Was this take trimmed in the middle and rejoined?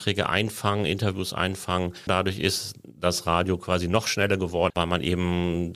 yes; 2 cuts; at 2.1 s, 4.7 s

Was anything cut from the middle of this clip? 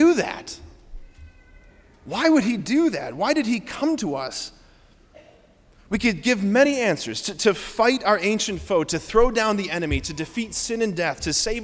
no; 0 cuts

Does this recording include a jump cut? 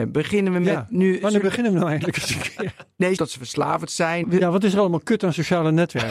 yes; 2 cuts; at 3.2 s, 4.2 s

